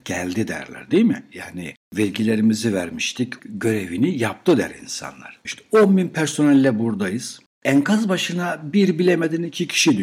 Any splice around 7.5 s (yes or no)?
no